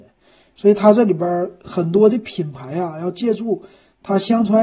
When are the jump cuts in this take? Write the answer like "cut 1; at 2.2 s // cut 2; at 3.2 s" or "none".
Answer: none